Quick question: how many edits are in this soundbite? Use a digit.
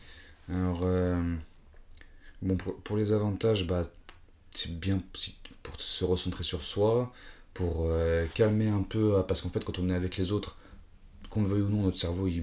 0